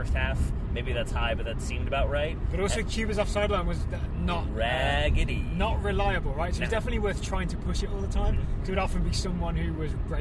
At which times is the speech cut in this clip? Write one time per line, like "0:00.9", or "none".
none